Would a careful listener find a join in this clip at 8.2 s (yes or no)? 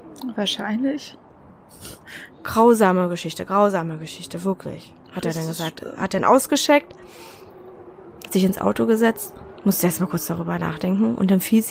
no